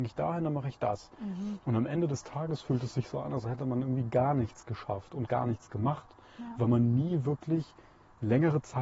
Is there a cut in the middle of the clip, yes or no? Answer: no